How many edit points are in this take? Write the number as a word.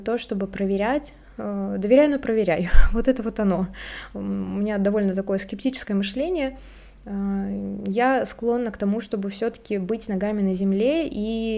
zero